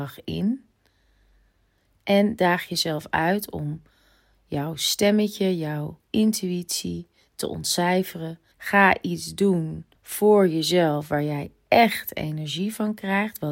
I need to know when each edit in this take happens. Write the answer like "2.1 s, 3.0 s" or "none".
8.5 s, 10.0 s